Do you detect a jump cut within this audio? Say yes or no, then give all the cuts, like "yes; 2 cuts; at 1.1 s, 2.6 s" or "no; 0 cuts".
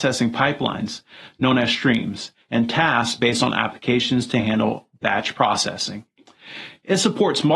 no; 0 cuts